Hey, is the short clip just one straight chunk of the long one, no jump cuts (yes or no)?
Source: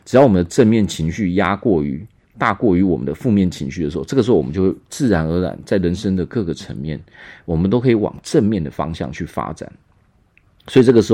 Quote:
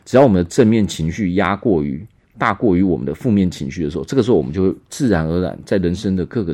yes